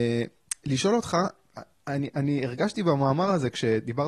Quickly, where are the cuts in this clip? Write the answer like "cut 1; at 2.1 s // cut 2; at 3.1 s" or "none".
none